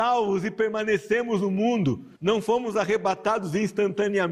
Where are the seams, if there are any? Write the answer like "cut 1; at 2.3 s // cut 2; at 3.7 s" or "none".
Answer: cut 1; at 2.1 s